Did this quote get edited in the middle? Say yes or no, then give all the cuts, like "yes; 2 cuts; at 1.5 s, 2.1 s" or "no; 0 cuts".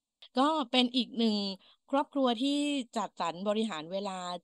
no; 0 cuts